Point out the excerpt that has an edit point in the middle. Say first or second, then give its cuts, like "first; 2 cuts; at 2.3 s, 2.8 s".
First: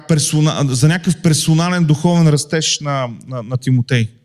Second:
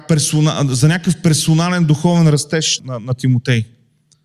second; 1 cut; at 2.8 s